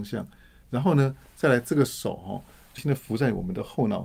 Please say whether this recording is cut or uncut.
cut